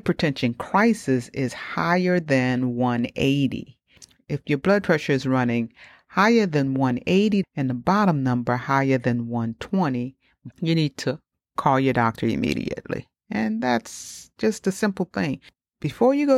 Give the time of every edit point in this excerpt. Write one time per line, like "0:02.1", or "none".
0:07.4
0:10.5